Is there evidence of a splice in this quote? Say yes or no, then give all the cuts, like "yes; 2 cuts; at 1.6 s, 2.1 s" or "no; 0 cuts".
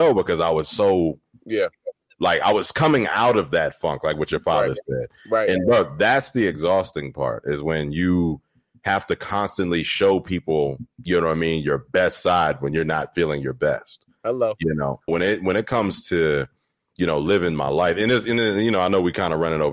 yes; 1 cut; at 15.1 s